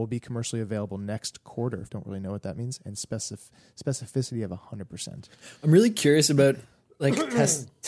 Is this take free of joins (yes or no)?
no